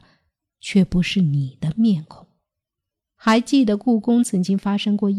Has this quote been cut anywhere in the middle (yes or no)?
yes